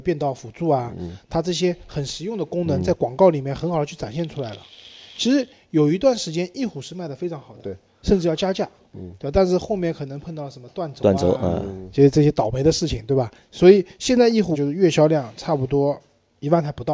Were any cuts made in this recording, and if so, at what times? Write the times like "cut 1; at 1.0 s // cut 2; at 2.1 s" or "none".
cut 1; at 13.5 s // cut 2; at 14.5 s